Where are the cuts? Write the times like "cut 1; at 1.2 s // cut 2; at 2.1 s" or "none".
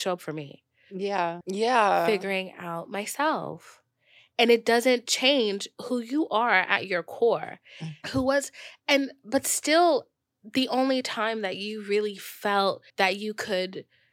cut 1; at 1.4 s // cut 2; at 8.0 s // cut 3; at 12.9 s